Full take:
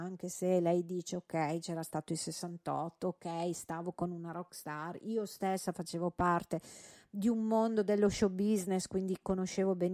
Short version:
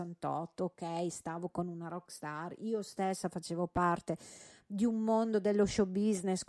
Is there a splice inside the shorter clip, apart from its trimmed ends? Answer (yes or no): no